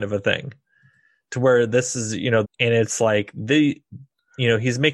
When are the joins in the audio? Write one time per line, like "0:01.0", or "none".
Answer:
0:02.4

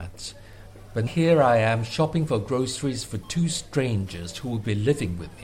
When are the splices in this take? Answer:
0:01.1

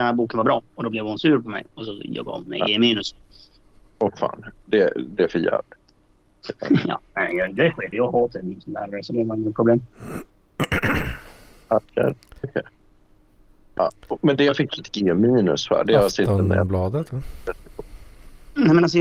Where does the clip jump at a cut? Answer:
0:07.9
0:12.4

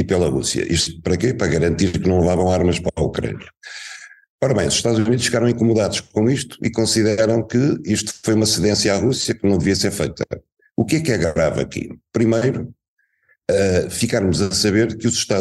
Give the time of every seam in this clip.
none

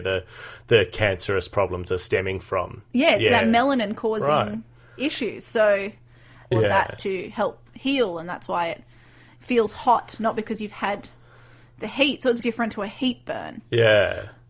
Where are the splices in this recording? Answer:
0:06.5
0:12.4

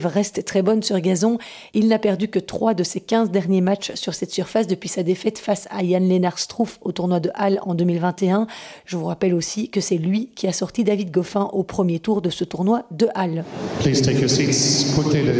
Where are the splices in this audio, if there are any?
0:08.8

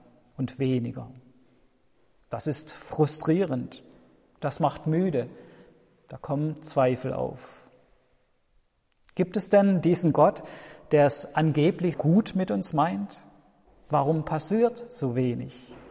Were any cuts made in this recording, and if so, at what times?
0:11.9

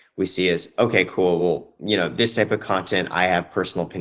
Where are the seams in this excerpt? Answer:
none

